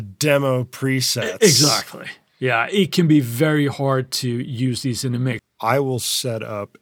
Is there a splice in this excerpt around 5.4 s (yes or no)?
yes